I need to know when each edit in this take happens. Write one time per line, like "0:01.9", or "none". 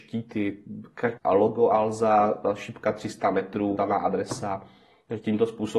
0:01.2
0:03.8